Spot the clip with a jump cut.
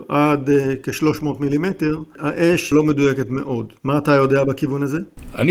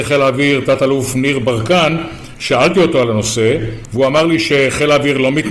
first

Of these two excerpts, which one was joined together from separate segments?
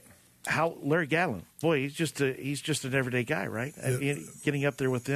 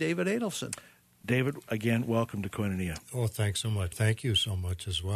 second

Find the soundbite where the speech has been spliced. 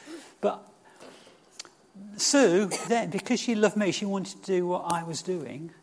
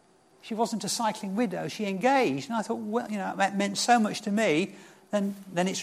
first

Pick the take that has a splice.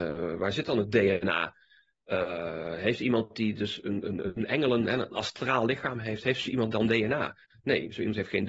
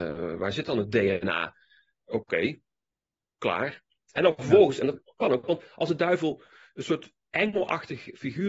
second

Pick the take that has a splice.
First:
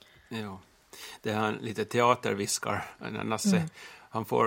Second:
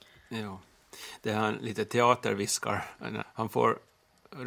second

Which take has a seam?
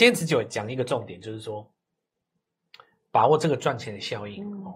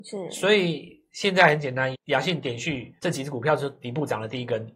second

